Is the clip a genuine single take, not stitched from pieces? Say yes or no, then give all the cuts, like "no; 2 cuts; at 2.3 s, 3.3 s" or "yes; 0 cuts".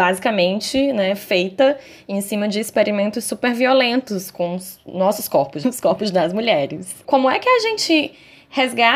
no; 1 cut; at 5.6 s